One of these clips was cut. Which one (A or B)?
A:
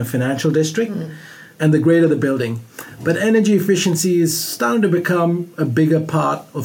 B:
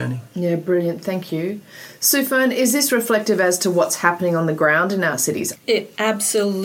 B